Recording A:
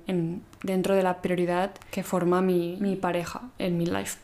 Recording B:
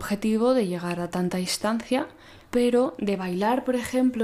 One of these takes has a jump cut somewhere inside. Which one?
B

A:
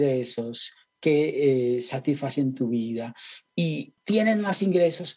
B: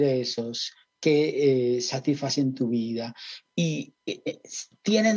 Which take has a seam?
A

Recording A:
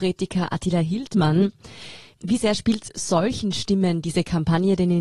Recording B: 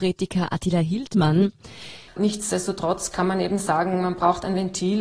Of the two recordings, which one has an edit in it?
B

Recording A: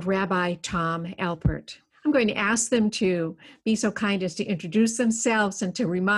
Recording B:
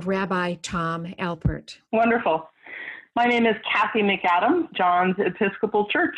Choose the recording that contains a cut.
B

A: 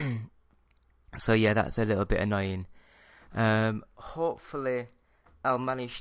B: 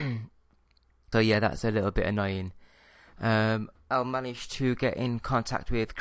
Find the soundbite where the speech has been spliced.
B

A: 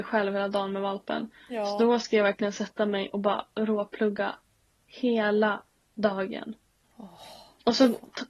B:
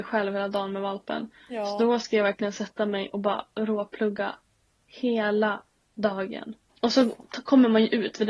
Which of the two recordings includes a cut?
B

